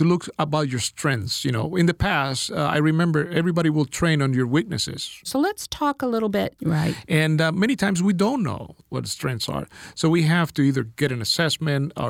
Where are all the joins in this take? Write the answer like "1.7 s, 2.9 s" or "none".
5.2 s, 6.6 s